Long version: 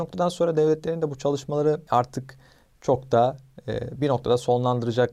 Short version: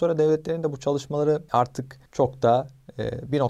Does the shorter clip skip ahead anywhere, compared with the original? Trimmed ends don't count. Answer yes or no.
yes